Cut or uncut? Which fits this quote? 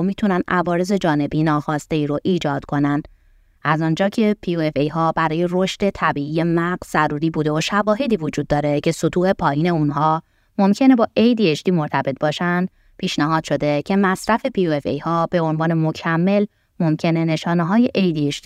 cut